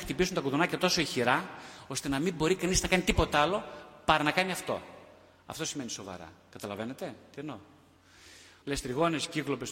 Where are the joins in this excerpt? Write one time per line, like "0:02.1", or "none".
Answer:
0:08.6